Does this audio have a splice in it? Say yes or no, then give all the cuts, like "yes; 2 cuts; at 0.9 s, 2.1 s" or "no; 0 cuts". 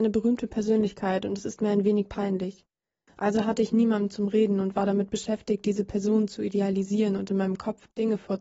yes; 1 cut; at 3.1 s